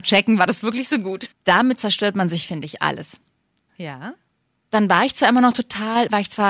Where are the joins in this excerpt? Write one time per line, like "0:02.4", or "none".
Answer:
0:01.3
0:03.7